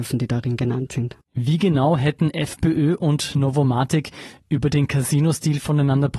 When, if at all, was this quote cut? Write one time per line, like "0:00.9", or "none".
0:01.3

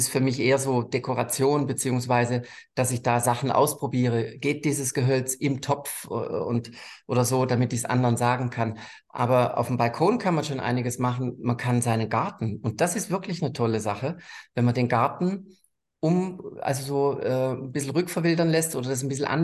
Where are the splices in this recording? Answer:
none

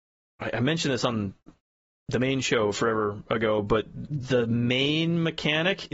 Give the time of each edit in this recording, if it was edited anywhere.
0:04.1

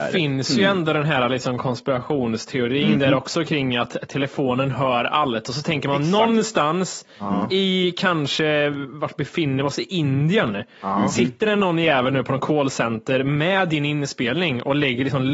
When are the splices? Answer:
none

